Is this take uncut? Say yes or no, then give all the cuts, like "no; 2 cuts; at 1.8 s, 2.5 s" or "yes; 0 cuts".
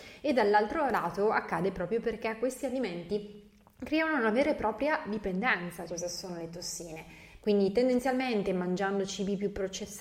no; 2 cuts; at 5.9 s, 7.4 s